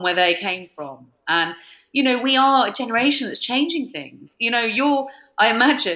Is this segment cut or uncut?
uncut